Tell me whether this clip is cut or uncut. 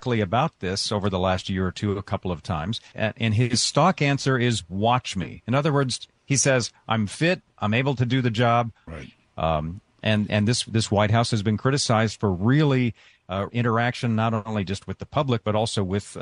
cut